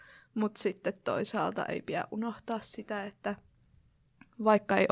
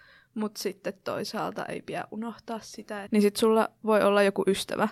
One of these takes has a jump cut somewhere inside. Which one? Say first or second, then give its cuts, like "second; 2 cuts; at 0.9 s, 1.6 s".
second; 1 cut; at 3.1 s